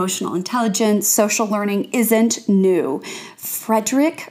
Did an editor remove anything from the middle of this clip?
no; 0 cuts

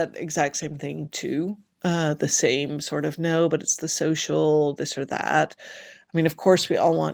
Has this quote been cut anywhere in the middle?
no; 0 cuts

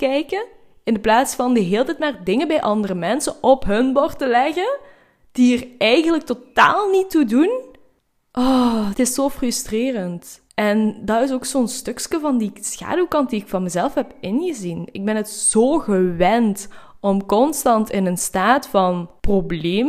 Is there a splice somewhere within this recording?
no; 0 cuts

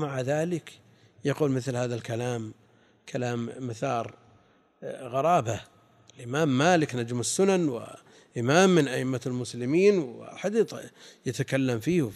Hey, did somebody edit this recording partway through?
no; 0 cuts

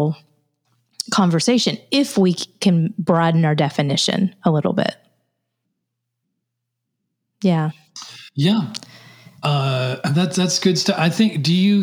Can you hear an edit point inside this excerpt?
no; 0 cuts

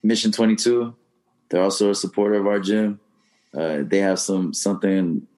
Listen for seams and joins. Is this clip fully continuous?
yes; 0 cuts

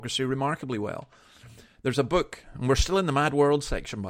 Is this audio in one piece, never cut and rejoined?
yes; 0 cuts

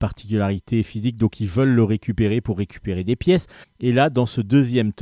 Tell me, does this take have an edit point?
yes; 1 cut; at 3.6 s

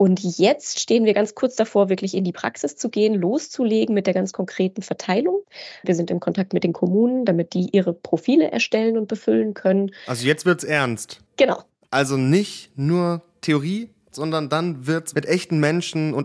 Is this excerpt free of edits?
no; 2 cuts; at 14.1 s, 15.1 s

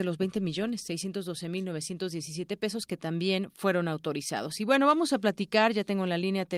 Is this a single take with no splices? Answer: yes; 0 cuts

